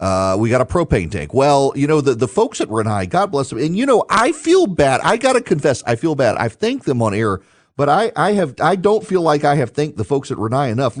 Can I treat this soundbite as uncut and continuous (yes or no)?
yes